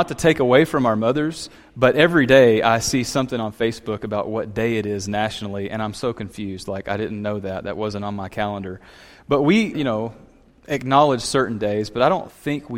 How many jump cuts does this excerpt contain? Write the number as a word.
one